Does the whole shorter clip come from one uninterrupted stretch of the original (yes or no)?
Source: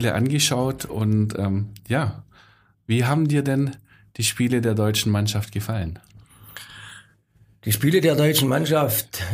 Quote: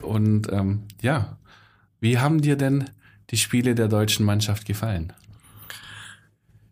yes